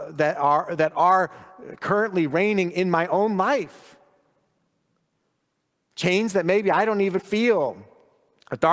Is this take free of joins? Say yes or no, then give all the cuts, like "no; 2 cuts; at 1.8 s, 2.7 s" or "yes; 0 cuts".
no; 1 cut; at 7.2 s